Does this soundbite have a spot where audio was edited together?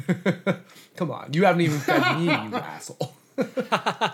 no; 0 cuts

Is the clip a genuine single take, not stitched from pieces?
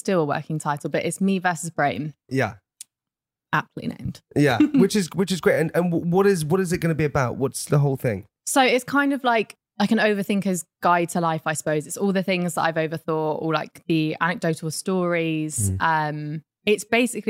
yes; 0 cuts

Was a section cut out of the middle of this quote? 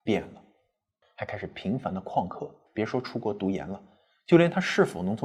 yes; 2 cuts; at 1.0 s, 2.7 s

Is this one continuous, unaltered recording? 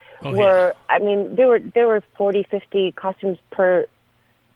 yes; 0 cuts

